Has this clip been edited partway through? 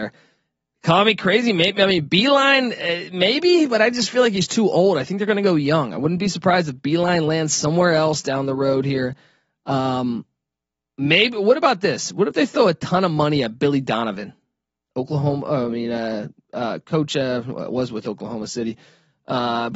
no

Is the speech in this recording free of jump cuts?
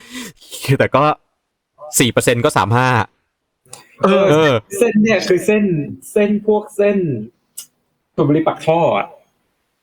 yes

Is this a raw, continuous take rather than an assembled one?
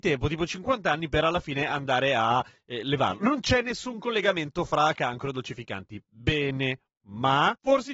yes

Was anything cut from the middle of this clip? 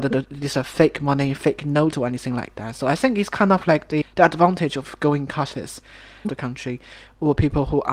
yes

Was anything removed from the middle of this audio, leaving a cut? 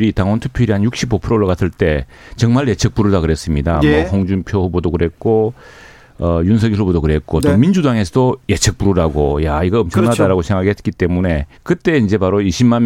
yes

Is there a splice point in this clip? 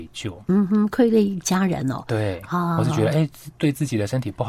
no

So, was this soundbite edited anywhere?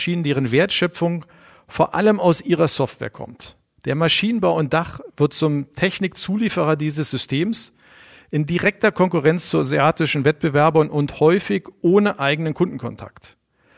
no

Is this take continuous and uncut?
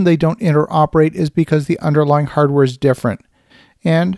yes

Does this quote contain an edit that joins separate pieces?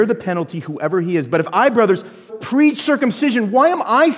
yes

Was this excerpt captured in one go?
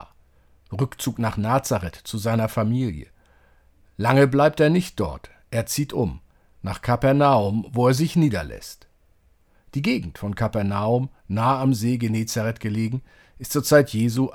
yes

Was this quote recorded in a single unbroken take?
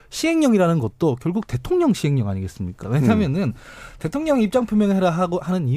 no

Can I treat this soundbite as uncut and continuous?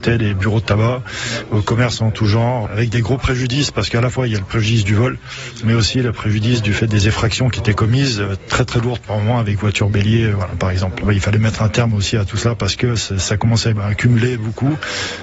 yes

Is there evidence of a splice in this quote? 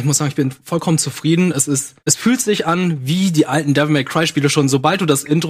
yes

